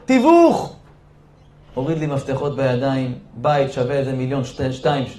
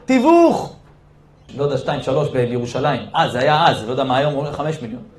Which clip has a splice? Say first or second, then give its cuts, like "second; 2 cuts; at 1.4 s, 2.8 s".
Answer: second; 1 cut; at 1.5 s